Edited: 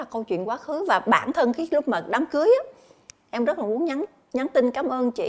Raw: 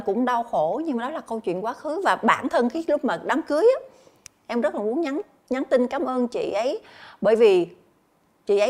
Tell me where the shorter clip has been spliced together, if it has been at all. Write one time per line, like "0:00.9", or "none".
none

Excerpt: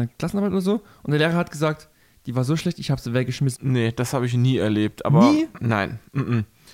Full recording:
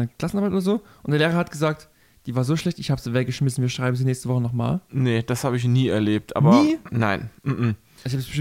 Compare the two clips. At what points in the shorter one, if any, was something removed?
0:03.6

